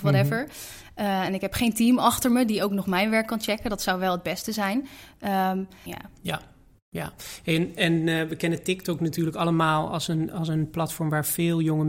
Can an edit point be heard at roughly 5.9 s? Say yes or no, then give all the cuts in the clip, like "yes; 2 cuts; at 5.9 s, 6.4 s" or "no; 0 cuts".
yes; 1 cut; at 5.9 s